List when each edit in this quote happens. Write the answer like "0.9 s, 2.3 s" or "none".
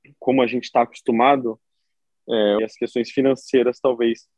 2.6 s